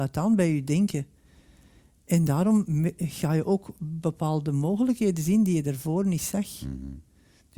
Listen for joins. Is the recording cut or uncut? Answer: uncut